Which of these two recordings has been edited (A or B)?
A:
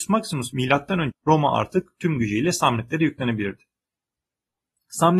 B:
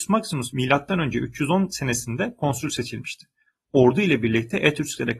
A